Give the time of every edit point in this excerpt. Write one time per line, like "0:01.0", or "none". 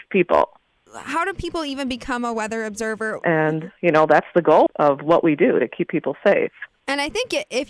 0:03.2
0:04.7